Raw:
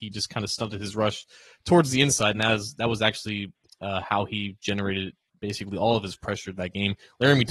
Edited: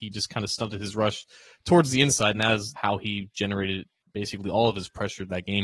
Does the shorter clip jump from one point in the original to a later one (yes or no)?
yes